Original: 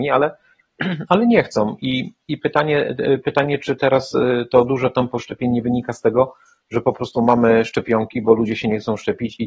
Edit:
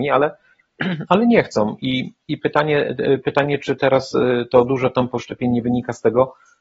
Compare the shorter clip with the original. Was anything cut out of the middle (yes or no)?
no